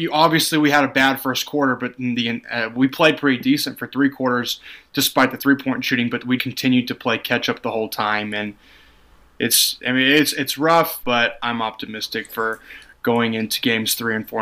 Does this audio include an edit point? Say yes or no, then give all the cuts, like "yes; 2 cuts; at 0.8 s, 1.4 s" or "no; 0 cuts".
yes; 2 cuts; at 6.4 s, 11.0 s